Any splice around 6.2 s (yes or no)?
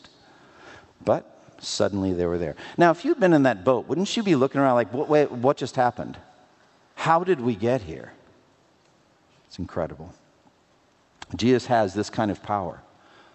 no